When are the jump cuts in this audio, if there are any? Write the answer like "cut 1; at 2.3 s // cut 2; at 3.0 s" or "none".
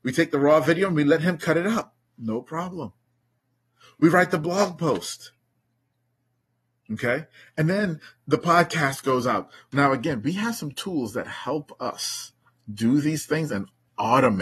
none